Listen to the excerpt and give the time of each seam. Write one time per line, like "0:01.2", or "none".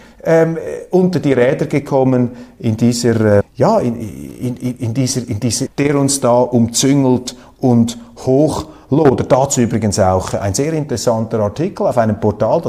0:03.4
0:05.7